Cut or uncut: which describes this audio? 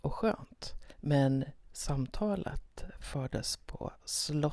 cut